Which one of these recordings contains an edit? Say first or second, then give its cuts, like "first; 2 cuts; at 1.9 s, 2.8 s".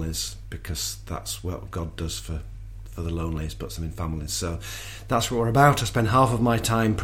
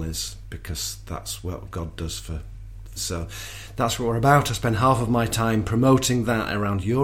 second; 1 cut; at 3.0 s